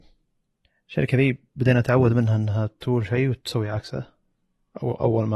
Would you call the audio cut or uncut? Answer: uncut